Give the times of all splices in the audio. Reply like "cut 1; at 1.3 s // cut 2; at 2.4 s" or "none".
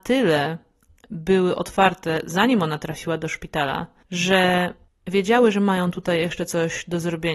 none